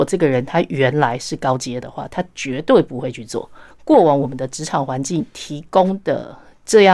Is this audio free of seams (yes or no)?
no